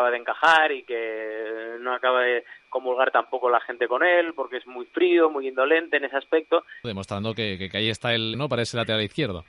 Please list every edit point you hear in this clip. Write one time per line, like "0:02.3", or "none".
0:06.8
0:08.3